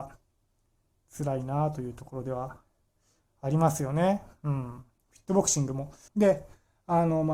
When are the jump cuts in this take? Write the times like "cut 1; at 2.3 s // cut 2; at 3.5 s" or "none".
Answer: cut 1; at 6.1 s